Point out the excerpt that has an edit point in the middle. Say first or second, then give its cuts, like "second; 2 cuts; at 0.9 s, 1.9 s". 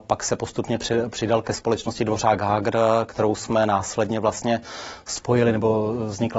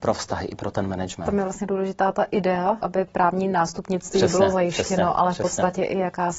second; 1 cut; at 2.8 s